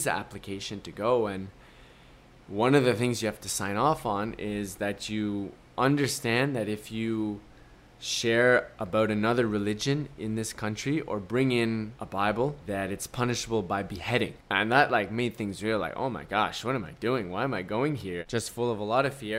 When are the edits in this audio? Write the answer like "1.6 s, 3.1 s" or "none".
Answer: none